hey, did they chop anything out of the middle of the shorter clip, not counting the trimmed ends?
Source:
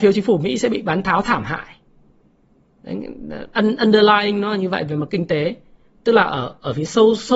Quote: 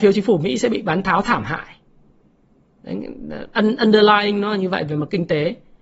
no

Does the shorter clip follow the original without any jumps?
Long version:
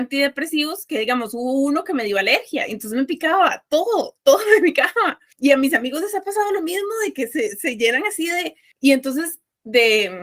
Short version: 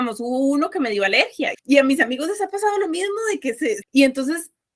no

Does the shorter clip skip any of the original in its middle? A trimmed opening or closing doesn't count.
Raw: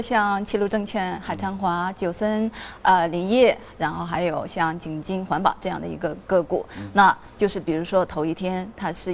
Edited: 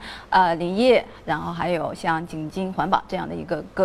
no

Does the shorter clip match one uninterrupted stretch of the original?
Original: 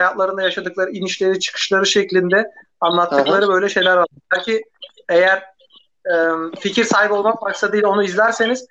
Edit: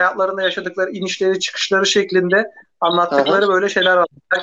yes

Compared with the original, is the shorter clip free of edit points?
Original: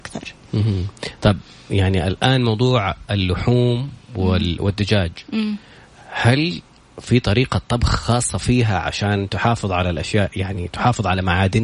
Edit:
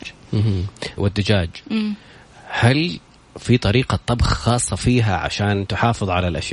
no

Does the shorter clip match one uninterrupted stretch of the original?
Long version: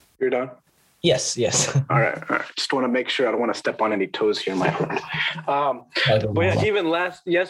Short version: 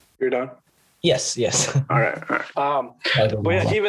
no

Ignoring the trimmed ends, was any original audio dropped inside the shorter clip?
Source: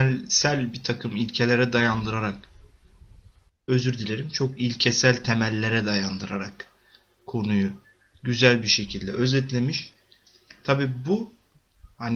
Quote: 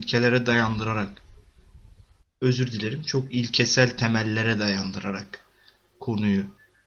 no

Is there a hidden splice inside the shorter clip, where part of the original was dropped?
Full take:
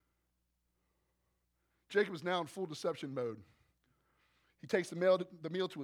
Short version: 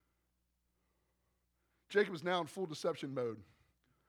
no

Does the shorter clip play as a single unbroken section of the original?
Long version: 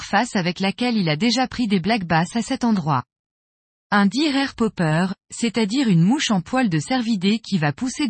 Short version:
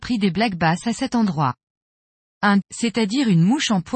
no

